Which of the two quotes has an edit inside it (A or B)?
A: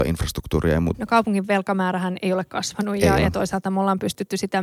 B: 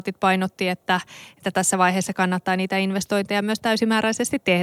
A